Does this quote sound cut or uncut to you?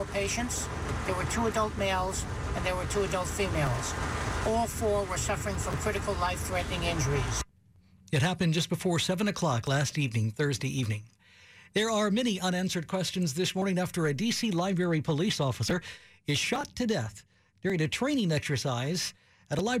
uncut